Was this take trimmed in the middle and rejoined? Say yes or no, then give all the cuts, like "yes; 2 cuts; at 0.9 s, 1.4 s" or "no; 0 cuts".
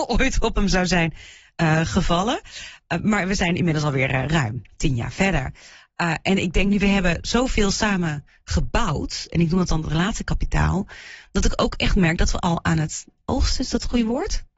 no; 0 cuts